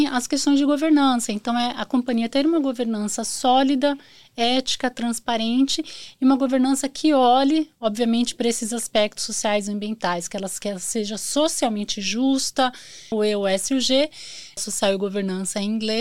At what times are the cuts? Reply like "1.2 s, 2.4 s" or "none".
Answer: 13.1 s, 14.6 s

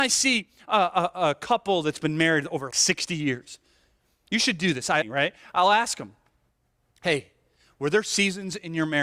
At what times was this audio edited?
2.7 s, 5.0 s

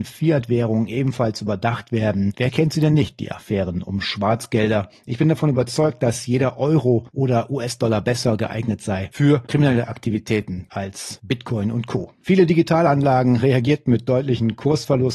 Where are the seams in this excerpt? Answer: 12.1 s

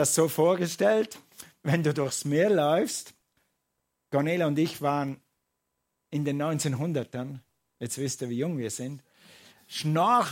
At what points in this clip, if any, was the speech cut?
none

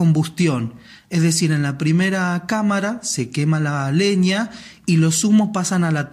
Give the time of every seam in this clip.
none

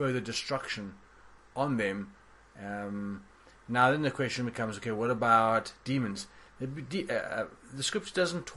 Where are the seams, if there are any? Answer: none

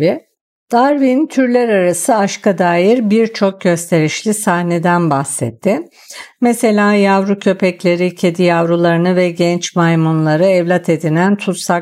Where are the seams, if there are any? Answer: none

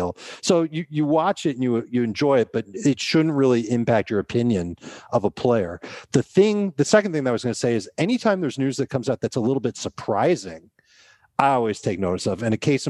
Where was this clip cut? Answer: none

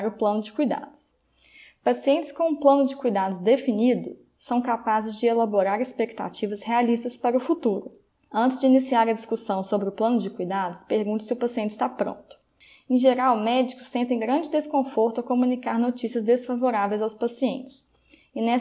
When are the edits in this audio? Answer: none

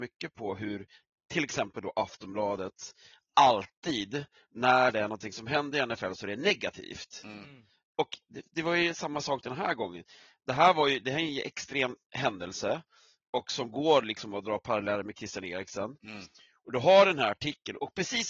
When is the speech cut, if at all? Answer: 7.9 s, 12.0 s

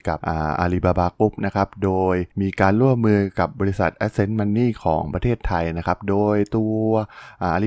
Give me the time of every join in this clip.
2.3 s

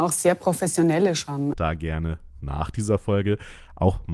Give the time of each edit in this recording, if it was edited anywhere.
1.5 s

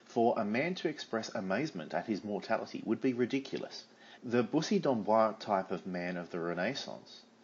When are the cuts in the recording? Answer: 4.2 s

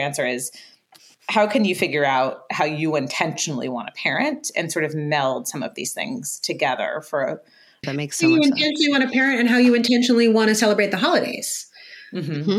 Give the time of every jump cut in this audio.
7.8 s

